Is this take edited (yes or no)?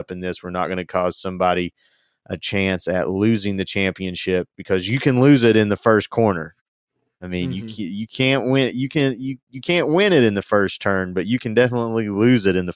no